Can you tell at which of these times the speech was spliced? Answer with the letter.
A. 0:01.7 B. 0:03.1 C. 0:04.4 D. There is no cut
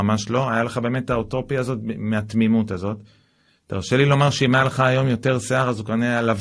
D